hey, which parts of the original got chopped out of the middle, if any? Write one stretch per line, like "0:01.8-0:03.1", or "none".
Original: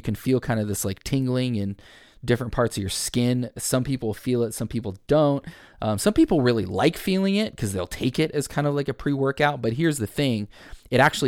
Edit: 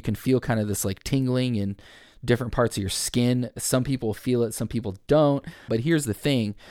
0:05.7-0:09.6